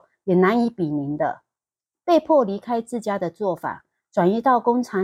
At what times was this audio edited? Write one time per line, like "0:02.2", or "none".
0:01.9

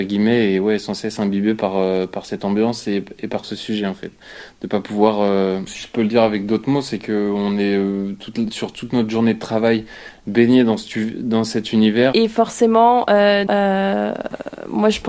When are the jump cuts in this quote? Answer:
0:05.7
0:12.1
0:13.5

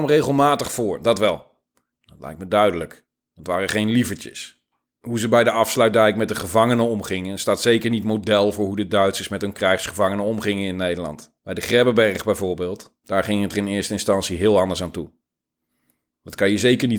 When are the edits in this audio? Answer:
0:01.9
0:04.9
0:11.4

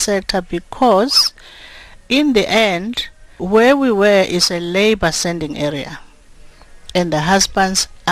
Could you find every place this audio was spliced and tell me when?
0:03.4

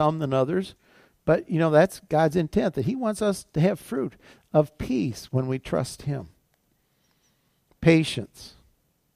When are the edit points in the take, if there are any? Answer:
none

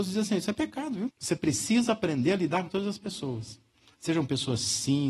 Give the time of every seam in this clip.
0:01.1

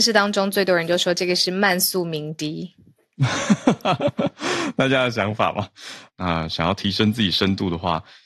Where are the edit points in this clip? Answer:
0:04.0
0:06.1

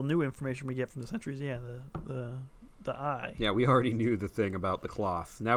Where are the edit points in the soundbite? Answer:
none

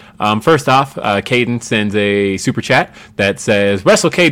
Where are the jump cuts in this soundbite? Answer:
none

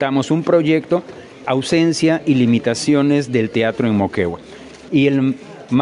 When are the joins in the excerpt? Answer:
0:01.4
0:04.9

